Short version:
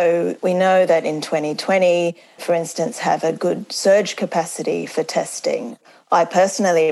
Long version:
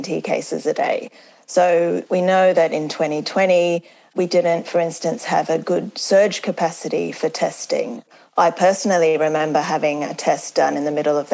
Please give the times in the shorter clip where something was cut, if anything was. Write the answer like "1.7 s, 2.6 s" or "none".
2.4 s